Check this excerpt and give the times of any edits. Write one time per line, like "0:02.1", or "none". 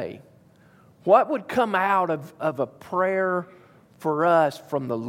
none